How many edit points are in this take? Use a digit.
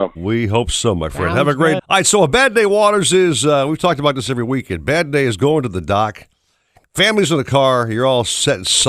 1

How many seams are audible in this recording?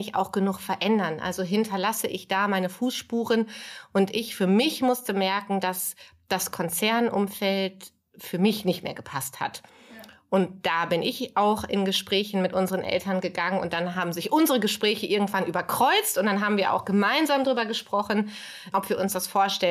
1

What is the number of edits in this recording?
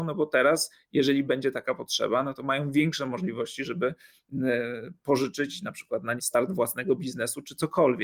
1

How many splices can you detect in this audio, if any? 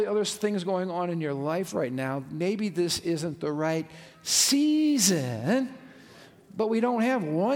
0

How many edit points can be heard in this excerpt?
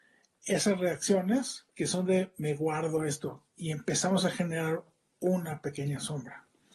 2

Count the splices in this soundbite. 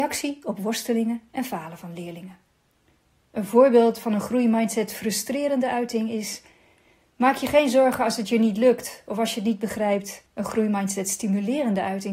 1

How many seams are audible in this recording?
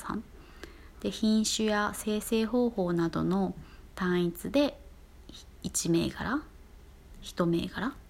1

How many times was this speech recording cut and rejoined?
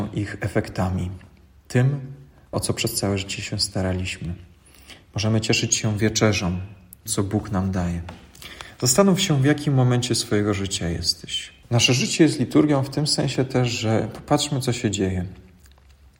3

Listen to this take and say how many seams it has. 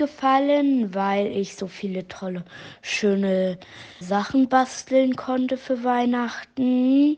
1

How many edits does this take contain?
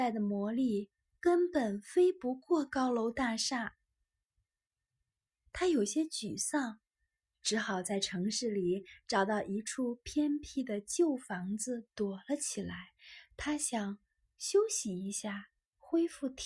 0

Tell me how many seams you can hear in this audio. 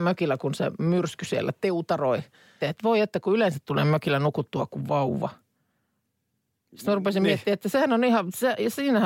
1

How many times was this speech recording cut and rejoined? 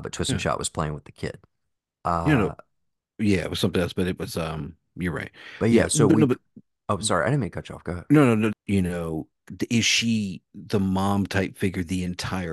1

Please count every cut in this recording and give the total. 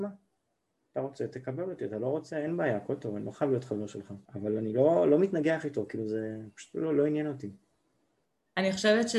1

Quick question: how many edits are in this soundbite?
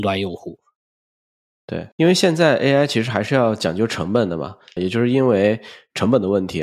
2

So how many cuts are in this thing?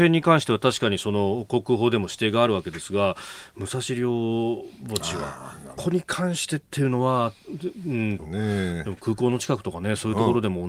2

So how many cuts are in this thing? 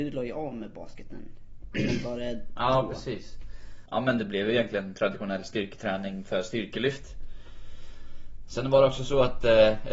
1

